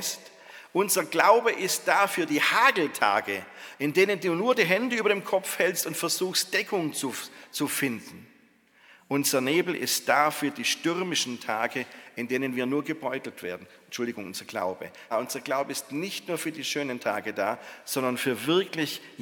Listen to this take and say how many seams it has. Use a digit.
1